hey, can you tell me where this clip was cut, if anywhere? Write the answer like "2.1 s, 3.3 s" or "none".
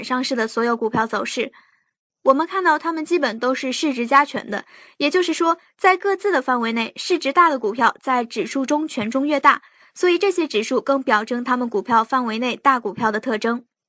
2.1 s